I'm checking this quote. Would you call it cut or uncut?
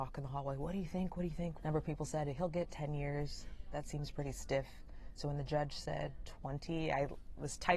cut